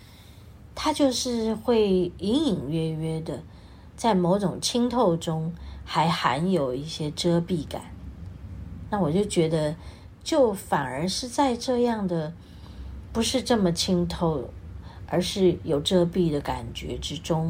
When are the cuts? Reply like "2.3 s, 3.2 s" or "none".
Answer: none